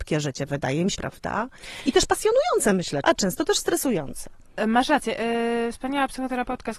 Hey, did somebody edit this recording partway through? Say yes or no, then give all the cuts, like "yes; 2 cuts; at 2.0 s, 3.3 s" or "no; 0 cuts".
yes; 2 cuts; at 0.9 s, 3.0 s